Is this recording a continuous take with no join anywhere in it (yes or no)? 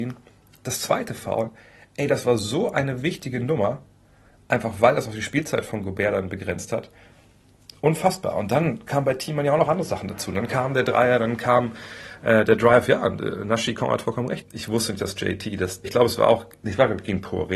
no